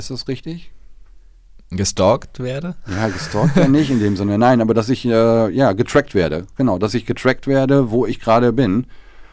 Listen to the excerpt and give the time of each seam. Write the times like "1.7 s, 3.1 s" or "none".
none

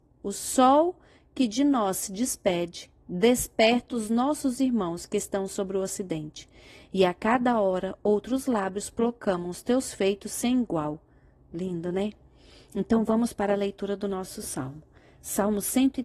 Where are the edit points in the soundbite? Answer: none

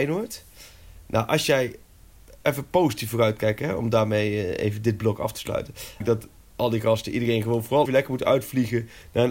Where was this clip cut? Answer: 6.0 s, 7.9 s

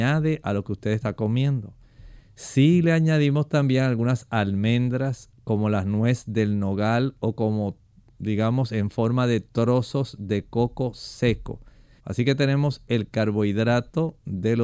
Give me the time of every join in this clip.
5.3 s, 12.0 s

